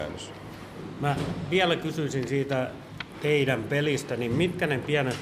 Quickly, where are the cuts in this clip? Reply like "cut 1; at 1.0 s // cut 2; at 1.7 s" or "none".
none